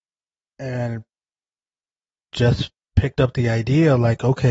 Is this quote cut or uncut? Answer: uncut